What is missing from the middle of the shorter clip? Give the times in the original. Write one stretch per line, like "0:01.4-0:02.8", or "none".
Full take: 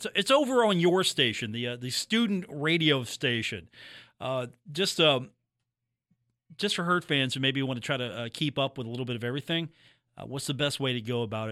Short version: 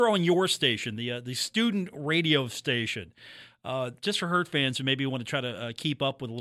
0:04.6-0:06.6